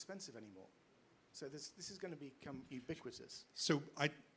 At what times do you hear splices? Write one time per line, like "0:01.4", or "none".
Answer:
none

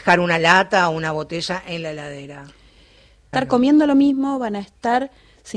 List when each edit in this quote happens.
0:03.3

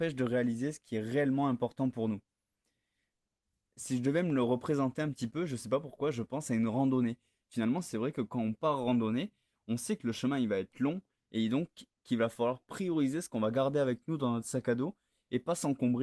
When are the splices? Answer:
none

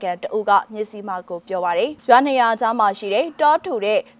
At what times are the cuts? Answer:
0:02.0

